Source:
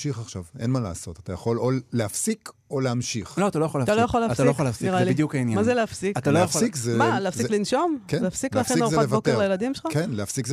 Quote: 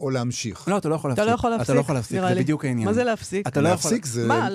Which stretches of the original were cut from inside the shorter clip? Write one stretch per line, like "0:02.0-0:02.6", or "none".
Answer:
none